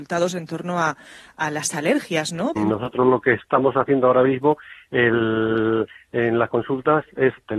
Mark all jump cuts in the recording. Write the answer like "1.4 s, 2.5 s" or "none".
2.6 s